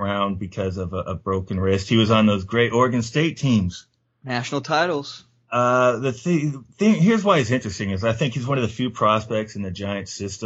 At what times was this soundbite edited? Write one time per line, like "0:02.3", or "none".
none